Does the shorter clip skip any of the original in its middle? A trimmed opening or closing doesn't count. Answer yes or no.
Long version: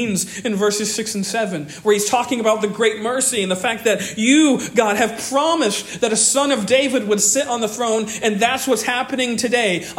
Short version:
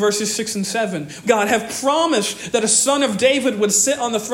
yes